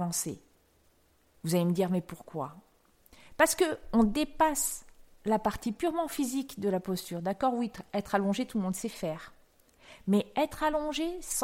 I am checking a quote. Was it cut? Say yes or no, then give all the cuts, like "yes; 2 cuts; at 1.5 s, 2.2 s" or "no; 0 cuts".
no; 0 cuts